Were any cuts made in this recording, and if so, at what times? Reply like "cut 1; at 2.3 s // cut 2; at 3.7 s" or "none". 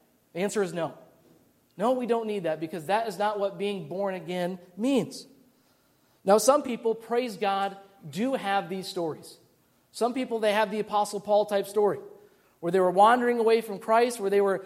none